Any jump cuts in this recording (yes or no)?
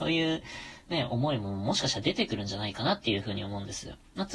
no